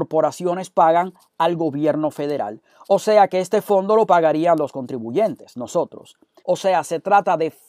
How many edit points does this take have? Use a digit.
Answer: 1